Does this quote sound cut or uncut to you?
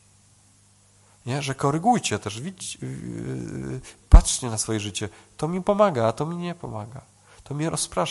uncut